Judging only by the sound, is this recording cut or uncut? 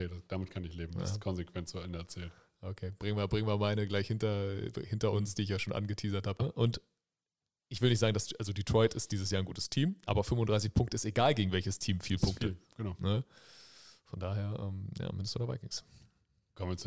cut